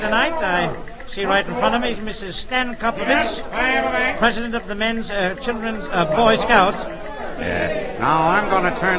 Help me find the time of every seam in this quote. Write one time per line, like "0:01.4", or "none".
0:07.4